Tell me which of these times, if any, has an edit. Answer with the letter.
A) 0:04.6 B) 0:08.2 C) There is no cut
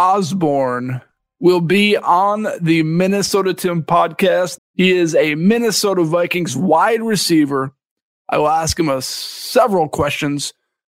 A